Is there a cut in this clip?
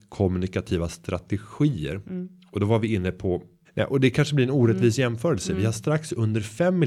yes; 1 cut; at 3.6 s

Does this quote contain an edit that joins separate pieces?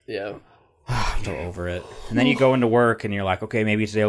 yes; 1 cut; at 1.2 s

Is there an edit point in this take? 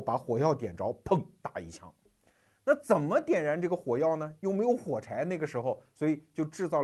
no; 0 cuts

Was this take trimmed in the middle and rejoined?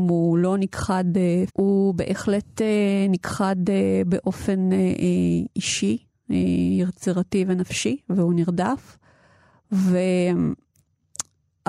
yes; 1 cut; at 1.5 s

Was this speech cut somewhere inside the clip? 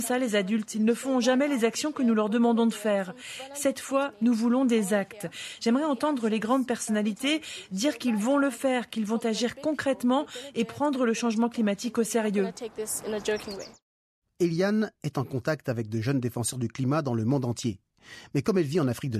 no; 0 cuts

